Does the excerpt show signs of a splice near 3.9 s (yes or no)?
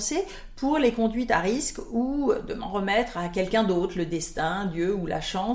no